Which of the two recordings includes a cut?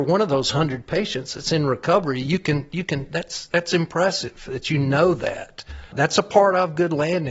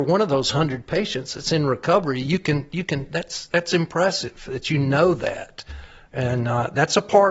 first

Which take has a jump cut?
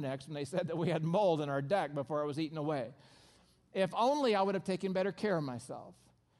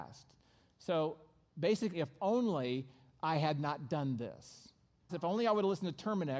second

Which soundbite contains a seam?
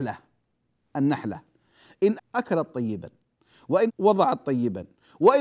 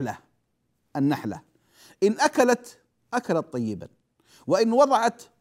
first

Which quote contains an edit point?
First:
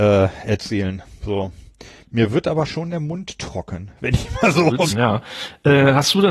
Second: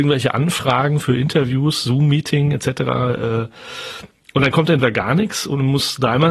first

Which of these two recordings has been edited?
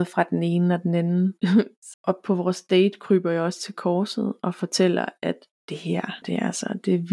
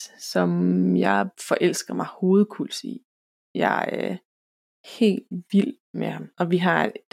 first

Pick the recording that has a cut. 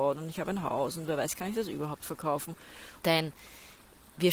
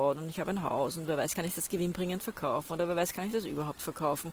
first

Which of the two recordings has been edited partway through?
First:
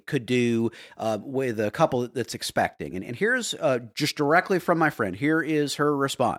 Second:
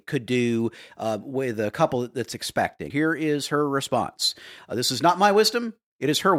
second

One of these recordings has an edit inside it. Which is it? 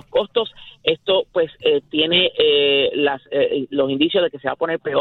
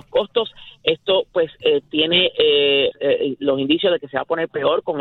second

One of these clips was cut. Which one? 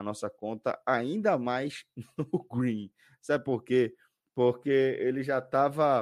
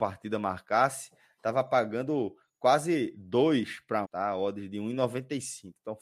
second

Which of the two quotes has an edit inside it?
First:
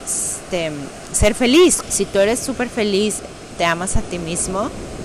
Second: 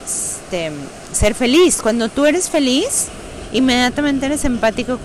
first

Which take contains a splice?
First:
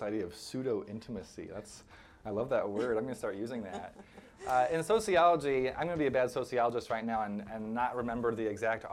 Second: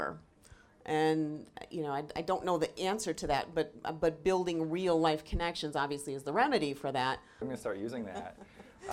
second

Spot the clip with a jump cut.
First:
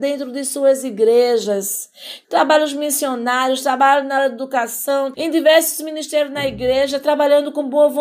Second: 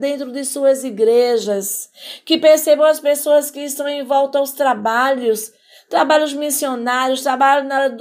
first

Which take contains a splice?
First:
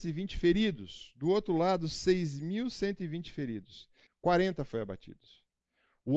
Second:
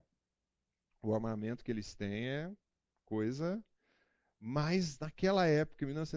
first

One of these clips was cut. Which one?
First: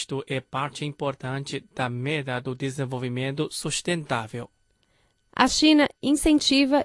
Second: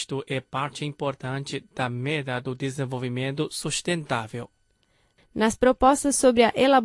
second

